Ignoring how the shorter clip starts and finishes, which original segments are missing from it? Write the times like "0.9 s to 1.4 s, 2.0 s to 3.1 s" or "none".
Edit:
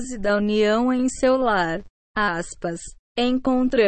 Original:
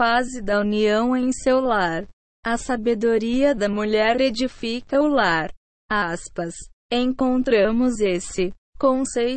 2.2 s to 5.8 s